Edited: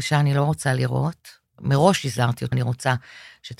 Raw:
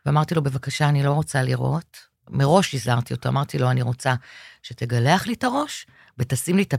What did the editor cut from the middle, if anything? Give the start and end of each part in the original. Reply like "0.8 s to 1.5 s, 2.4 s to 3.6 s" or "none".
3.2 s to 3.7 s